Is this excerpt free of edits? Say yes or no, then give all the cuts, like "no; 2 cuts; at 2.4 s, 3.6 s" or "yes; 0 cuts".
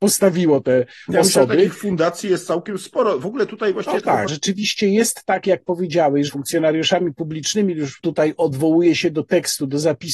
no; 3 cuts; at 4.3 s, 6.3 s, 8.0 s